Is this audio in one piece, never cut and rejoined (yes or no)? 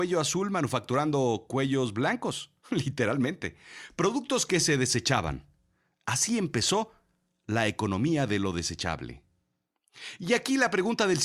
no